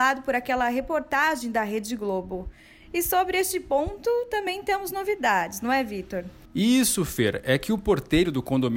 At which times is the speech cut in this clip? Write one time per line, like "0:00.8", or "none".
none